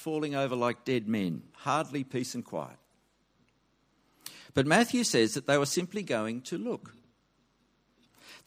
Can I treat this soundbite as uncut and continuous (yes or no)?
no